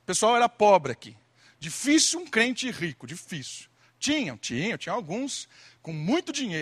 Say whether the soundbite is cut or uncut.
uncut